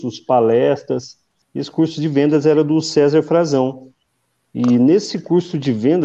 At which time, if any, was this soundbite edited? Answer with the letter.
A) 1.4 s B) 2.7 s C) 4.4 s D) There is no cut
A